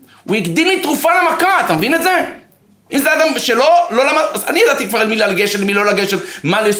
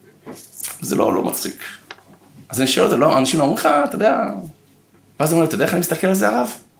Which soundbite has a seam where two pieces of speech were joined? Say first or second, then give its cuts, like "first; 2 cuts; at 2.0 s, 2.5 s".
first; 1 cut; at 2.9 s